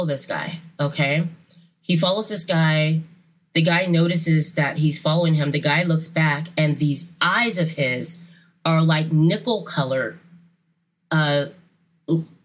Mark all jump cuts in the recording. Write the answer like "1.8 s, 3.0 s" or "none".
none